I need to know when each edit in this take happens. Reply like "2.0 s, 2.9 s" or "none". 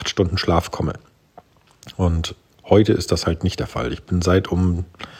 none